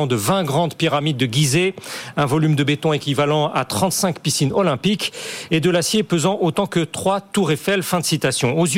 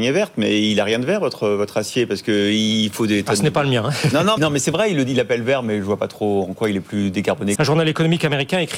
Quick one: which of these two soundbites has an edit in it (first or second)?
second